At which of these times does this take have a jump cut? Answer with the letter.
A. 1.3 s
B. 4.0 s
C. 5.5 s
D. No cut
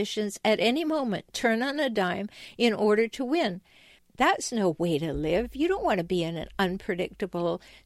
B